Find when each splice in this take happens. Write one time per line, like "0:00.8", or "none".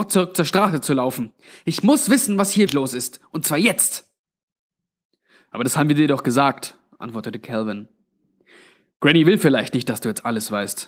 0:02.7